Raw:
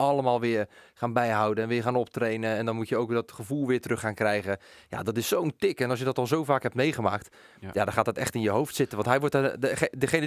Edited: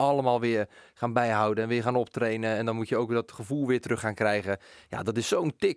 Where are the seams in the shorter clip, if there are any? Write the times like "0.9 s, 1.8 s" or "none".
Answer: none